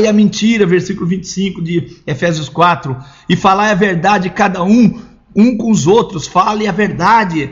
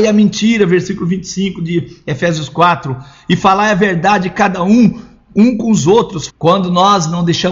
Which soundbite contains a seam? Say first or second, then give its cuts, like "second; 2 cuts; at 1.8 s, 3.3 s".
second; 1 cut; at 6.3 s